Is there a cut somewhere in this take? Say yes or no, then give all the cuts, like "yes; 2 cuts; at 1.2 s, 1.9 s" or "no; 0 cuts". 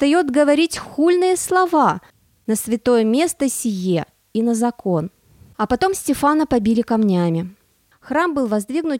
yes; 1 cut; at 7.9 s